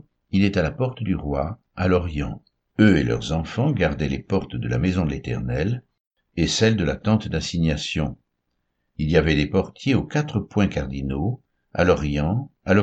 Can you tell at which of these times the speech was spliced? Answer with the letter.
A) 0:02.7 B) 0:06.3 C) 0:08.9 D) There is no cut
A